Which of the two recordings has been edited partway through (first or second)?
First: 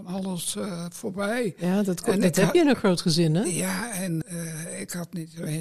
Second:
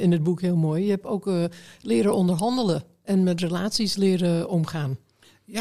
first